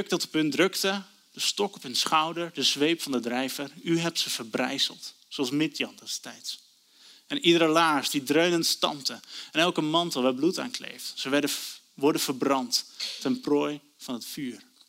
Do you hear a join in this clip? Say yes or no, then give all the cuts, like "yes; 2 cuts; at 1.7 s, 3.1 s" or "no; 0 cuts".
no; 0 cuts